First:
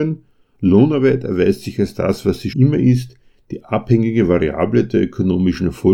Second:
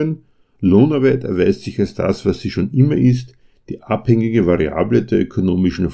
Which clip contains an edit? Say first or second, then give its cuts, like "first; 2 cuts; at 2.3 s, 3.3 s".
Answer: first; 1 cut; at 2.5 s